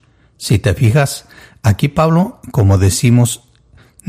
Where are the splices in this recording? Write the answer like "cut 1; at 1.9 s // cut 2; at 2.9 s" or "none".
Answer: none